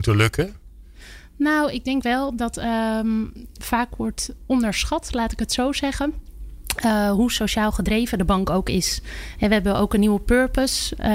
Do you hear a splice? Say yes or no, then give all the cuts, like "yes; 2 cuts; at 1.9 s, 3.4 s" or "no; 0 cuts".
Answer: no; 0 cuts